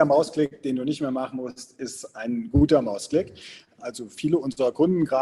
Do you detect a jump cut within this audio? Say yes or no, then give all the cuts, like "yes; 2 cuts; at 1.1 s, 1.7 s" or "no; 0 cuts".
yes; 1 cut; at 3.8 s